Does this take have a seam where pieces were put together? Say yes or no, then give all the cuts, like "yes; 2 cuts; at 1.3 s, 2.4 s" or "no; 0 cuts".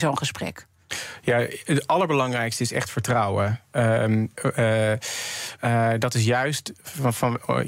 yes; 2 cuts; at 4.3 s, 5.6 s